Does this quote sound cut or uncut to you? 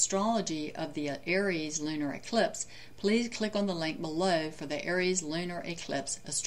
uncut